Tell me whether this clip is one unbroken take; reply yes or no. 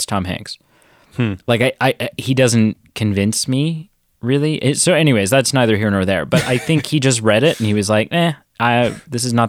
yes